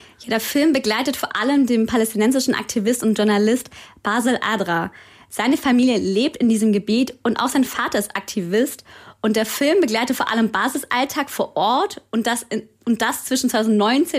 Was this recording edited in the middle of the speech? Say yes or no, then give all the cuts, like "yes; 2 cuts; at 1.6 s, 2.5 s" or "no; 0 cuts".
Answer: no; 0 cuts